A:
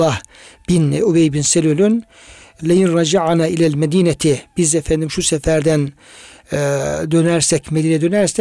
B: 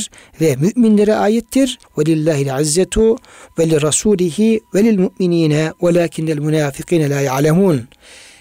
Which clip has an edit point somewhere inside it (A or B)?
B